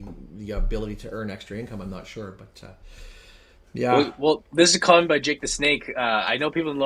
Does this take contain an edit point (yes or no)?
no